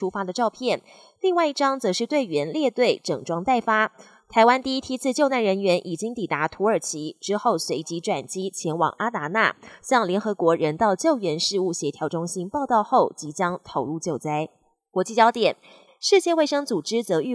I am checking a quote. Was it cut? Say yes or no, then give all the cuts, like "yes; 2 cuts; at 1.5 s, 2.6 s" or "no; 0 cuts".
yes; 1 cut; at 15.9 s